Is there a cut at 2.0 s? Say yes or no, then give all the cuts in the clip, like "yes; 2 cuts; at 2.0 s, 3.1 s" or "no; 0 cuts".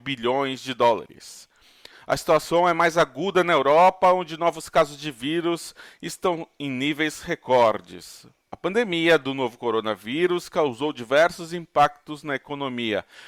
no; 0 cuts